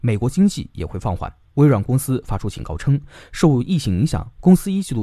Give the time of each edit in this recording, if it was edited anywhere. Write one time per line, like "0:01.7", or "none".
none